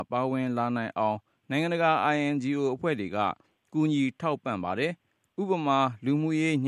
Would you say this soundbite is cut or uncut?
uncut